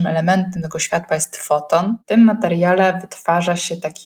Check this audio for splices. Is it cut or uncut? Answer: uncut